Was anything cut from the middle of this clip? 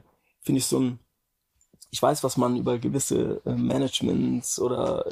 no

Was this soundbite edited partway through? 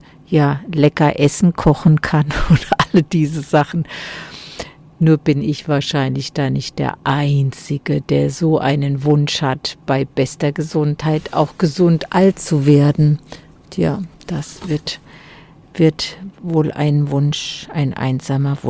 yes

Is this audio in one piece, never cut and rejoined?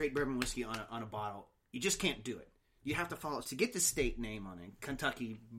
no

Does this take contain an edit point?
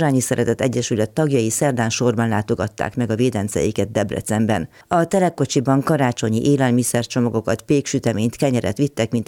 no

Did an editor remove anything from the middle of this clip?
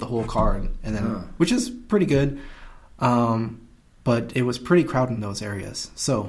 yes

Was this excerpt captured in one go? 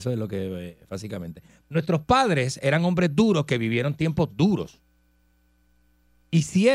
no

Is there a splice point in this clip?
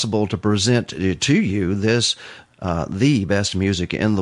no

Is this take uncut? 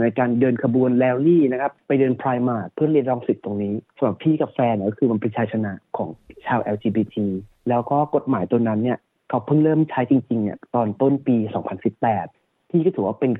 yes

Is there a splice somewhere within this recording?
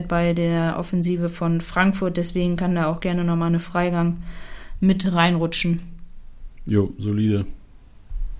no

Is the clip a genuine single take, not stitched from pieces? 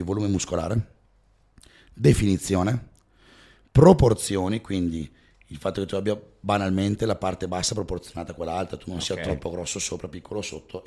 yes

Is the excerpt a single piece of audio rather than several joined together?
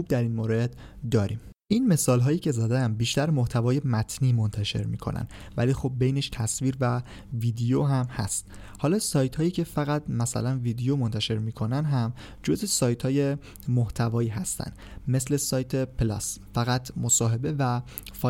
no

